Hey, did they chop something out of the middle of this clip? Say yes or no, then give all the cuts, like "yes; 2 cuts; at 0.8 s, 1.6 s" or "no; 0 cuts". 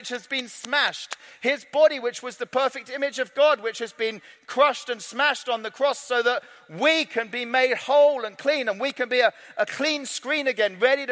no; 0 cuts